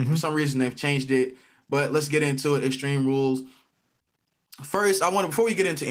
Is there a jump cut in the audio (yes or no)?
no